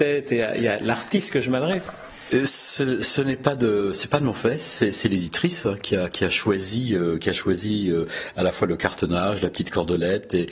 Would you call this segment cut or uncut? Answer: uncut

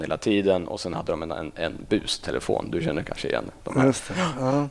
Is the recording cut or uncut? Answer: uncut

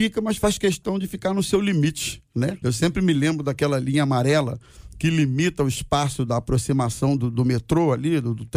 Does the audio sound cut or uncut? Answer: cut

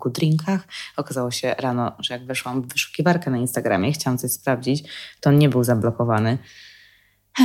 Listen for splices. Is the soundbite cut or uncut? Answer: uncut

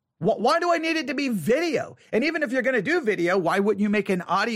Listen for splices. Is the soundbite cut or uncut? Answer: uncut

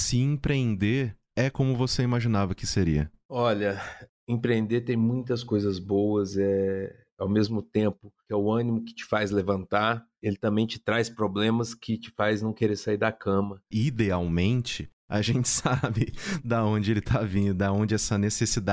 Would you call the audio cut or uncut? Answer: cut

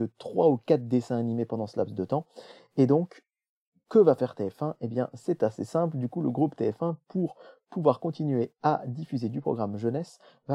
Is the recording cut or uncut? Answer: uncut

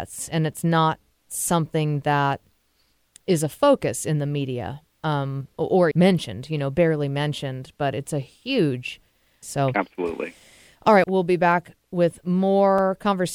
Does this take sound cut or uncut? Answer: cut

